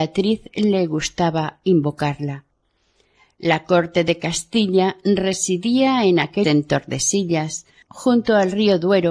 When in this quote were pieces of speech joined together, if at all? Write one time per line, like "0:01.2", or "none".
0:06.4
0:07.8